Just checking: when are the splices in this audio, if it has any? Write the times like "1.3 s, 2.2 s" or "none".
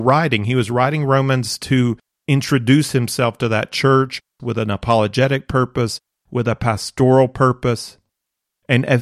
4.4 s